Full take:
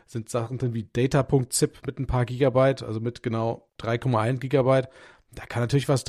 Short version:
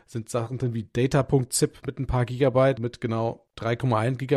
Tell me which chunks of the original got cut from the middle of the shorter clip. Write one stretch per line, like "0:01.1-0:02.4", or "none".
0:02.8-0:03.0